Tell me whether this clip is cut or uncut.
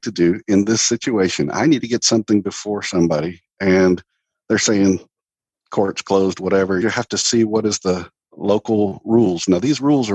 cut